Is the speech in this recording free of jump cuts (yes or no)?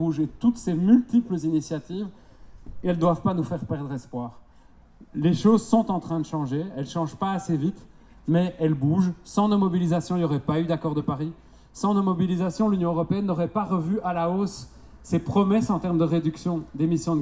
yes